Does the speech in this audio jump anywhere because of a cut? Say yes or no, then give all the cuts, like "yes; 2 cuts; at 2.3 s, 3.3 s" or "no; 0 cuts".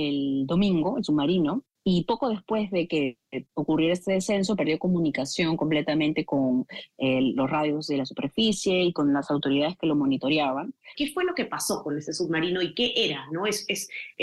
yes; 1 cut; at 10.9 s